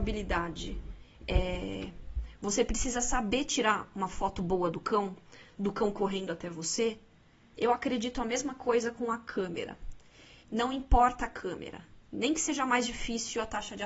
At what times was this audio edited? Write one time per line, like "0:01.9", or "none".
0:07.5
0:10.4